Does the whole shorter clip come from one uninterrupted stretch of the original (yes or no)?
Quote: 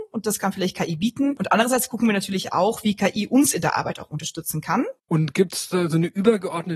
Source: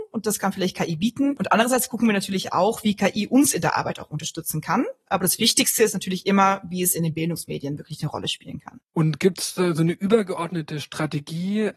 no